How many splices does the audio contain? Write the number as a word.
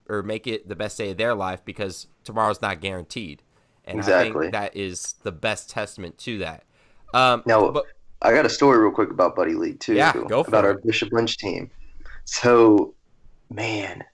zero